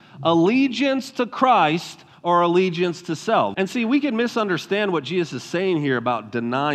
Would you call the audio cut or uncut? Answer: cut